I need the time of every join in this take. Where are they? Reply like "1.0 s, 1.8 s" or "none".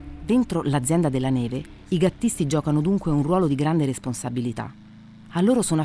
none

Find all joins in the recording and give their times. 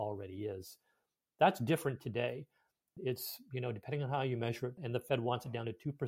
3.0 s, 4.8 s

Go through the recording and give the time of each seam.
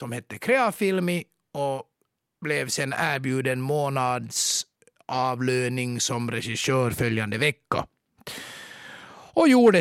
none

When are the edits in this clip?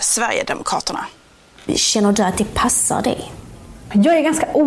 1.7 s

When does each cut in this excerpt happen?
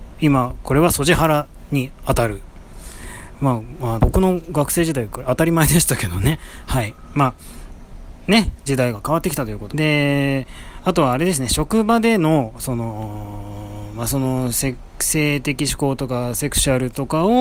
4.0 s, 9.7 s

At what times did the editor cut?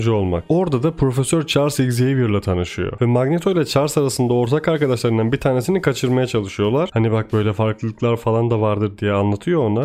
3.0 s, 6.9 s

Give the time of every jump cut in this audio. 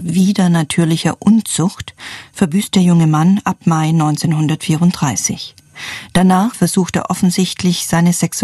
6.5 s

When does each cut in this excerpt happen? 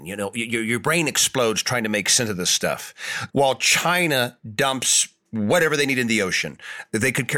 3.3 s

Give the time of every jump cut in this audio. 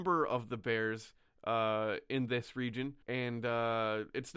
3.0 s

